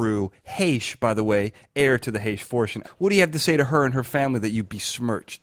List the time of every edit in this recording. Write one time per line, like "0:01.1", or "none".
0:02.8

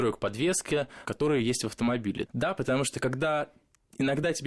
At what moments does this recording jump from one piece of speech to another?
0:01.1
0:02.3

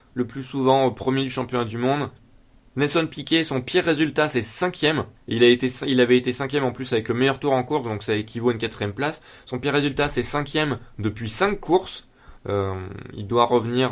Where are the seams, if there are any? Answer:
0:05.2
0:12.4

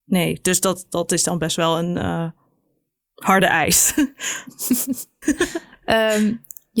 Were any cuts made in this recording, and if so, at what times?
0:05.2

